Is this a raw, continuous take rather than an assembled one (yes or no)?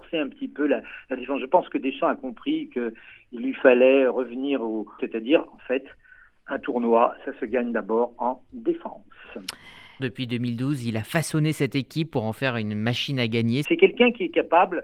no